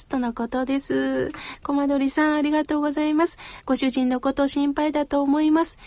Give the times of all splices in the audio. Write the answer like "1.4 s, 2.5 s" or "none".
none